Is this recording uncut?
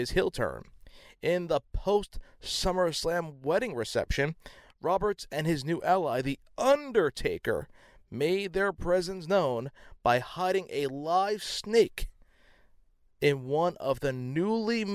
yes; 0 cuts

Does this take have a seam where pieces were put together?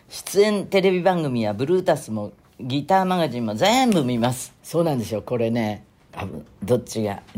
yes; 2 cuts; at 4.6 s, 6.1 s

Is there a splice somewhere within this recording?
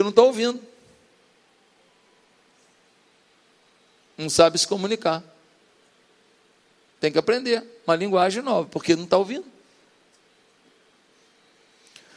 no; 0 cuts

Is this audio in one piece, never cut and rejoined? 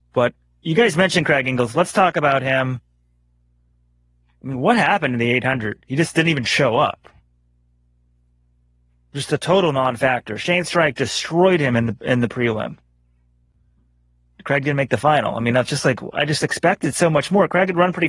yes; 0 cuts

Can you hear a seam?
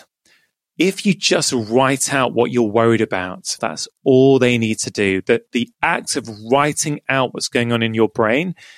yes; 1 cut; at 3.6 s

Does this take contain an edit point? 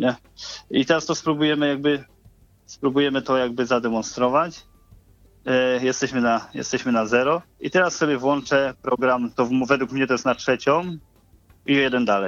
yes; 2 cuts; at 7.5 s, 9.4 s

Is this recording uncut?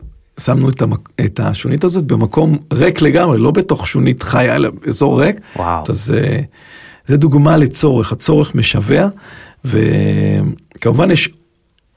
no; 1 cut; at 5.8 s

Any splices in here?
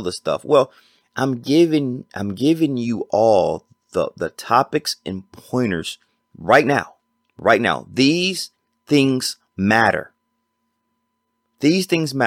no; 0 cuts

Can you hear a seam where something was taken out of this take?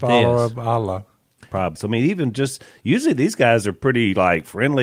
yes; 1 cut; at 1.8 s

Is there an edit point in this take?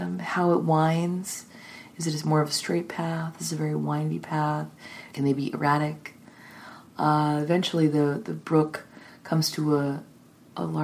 yes; 1 cut; at 5.1 s

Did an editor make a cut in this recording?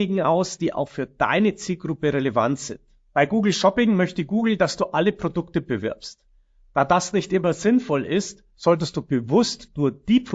no; 0 cuts

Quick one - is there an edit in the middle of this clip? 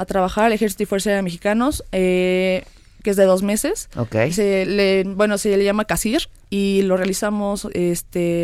yes; 1 cut; at 3.0 s

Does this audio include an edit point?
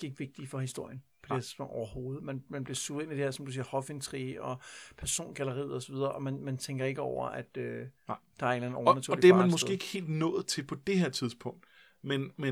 no; 0 cuts

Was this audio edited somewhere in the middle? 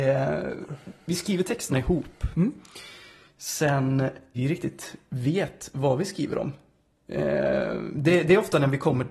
yes; 1 cut; at 4.3 s

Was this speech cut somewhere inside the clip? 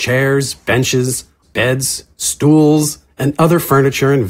yes; 1 cut; at 1.4 s

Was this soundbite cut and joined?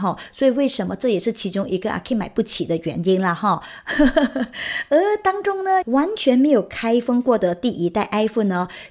yes; 1 cut; at 5.8 s

